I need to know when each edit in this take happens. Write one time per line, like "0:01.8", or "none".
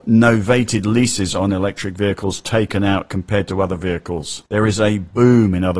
none